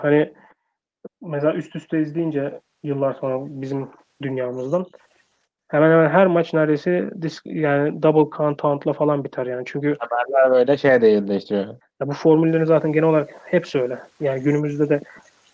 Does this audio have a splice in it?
yes; 3 cuts; at 1.1 s, 5.6 s, 11.8 s

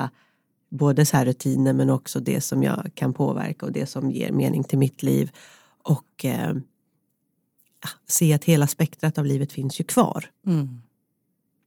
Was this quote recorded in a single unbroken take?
yes; 0 cuts

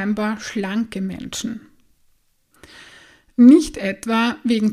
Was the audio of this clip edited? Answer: no; 0 cuts

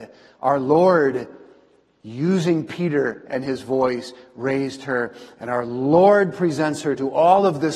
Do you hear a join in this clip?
no; 0 cuts

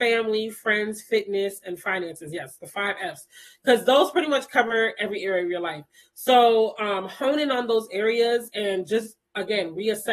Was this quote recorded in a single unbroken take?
yes; 0 cuts

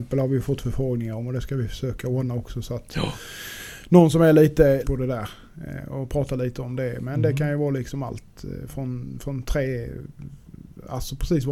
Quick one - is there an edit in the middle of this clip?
yes; 1 cut; at 4.8 s

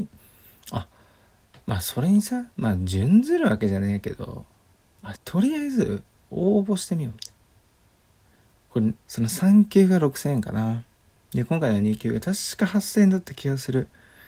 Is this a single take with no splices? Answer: no; 2 cuts; at 5.1 s, 8.9 s

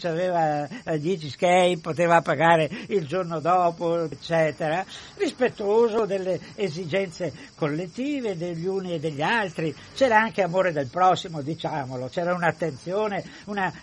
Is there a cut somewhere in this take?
yes; 1 cut; at 4.1 s

